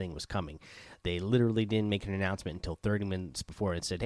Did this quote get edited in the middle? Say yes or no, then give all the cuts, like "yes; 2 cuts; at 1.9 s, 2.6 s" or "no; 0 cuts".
no; 0 cuts